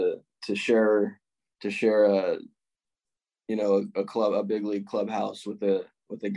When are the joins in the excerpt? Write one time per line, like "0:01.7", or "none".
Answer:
none